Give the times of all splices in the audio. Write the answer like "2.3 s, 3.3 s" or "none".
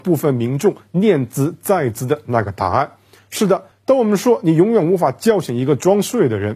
3.7 s